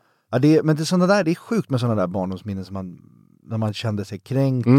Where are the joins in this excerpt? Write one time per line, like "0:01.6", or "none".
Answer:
none